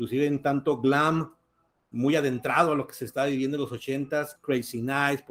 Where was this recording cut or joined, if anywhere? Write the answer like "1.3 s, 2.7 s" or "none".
4.4 s